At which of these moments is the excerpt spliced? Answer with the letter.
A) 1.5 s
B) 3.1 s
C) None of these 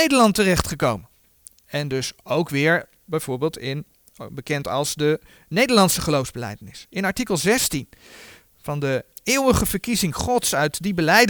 B